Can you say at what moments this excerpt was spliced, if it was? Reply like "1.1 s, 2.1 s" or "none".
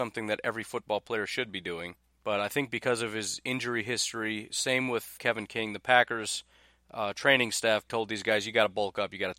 5.2 s, 7.9 s